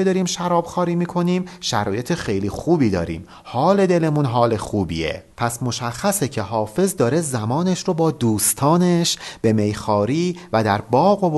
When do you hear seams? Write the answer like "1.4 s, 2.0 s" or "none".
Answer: 5.3 s